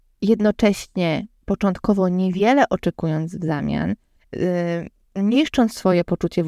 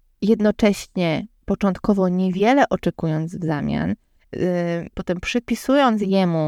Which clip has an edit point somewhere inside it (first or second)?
second